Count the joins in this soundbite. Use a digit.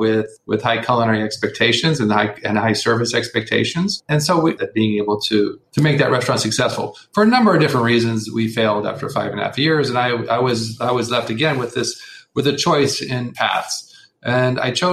1